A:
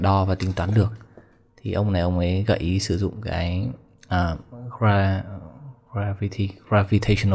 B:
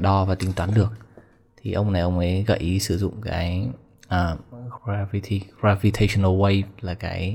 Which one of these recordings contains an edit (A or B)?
B